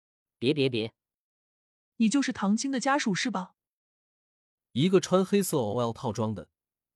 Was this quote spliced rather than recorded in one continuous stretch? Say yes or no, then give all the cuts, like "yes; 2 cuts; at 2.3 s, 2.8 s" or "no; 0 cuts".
yes; 1 cut; at 1.9 s